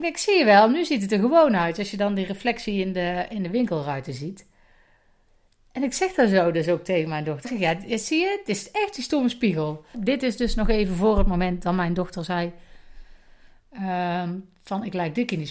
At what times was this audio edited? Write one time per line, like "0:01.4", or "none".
0:07.4
0:09.9